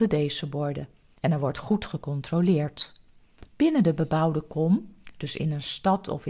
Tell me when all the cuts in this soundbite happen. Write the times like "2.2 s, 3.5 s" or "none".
1.2 s, 3.5 s